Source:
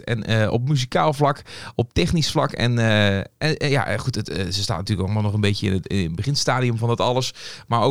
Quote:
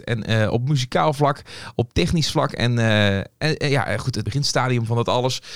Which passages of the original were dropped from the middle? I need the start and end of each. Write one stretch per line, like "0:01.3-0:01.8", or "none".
0:04.2-0:06.2